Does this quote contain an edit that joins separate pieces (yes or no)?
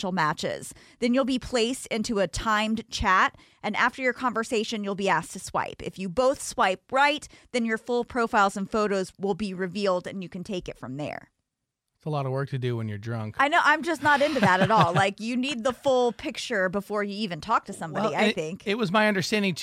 no